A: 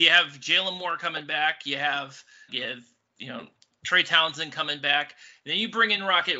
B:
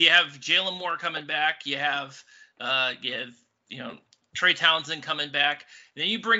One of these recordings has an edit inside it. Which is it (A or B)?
A